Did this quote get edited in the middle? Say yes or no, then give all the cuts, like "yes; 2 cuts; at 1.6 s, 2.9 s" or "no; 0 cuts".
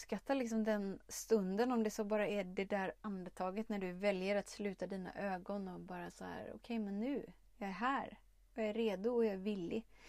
no; 0 cuts